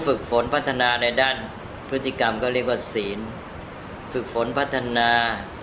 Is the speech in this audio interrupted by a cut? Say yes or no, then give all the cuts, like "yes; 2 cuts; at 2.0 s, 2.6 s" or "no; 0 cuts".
no; 0 cuts